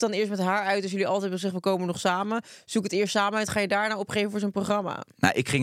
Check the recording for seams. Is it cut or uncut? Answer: uncut